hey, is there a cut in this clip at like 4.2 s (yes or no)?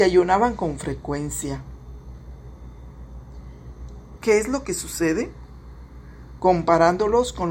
yes